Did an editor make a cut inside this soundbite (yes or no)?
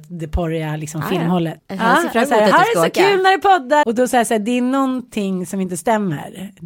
yes